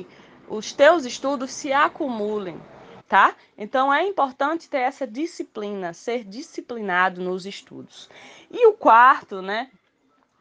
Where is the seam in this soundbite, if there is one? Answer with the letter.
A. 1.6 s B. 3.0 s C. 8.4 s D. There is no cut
B